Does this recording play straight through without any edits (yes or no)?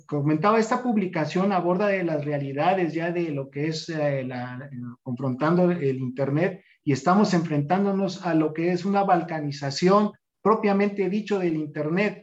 yes